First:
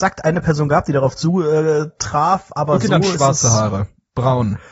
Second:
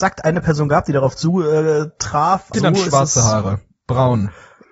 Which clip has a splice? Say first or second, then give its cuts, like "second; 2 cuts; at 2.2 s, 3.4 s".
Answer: second; 1 cut; at 2.5 s